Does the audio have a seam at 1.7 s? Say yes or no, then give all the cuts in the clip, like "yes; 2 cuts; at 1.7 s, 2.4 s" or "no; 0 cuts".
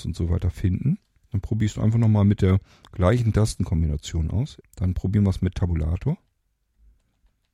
no; 1 cut; at 4.6 s